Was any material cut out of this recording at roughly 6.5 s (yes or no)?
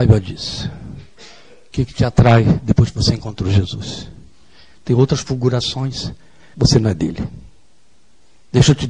yes